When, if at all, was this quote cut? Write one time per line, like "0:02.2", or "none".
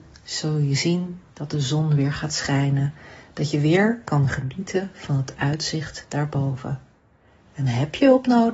none